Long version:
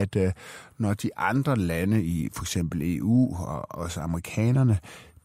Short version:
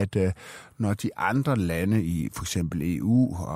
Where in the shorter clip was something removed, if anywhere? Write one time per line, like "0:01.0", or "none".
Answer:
none